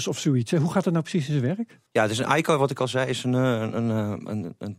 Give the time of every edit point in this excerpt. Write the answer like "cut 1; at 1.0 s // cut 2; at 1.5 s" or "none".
cut 1; at 1.9 s